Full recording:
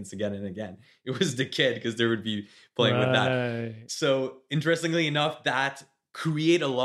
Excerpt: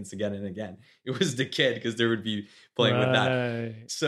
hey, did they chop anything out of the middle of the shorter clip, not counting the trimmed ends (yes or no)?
no